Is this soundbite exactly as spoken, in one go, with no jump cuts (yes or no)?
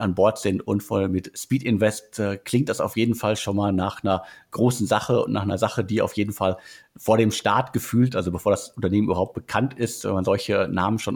yes